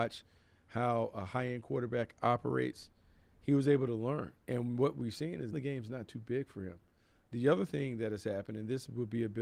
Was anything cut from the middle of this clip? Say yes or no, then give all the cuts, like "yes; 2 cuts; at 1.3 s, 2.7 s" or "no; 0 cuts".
yes; 2 cuts; at 4.4 s, 5.5 s